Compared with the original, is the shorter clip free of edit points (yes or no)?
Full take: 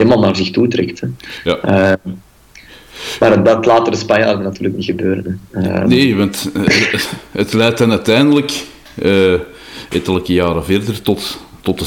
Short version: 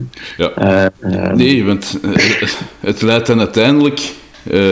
no